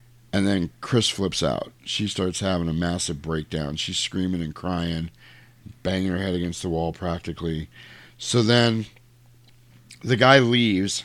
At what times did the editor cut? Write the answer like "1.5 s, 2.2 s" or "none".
none